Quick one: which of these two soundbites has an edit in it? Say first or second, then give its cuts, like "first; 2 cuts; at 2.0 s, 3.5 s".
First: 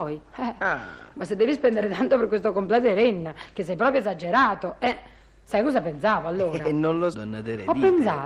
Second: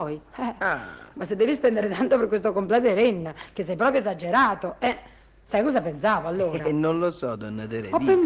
first; 1 cut; at 7.1 s